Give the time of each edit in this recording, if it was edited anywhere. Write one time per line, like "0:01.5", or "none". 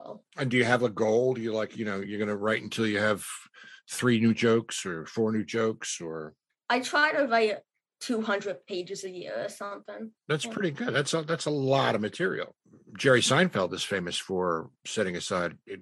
0:10.2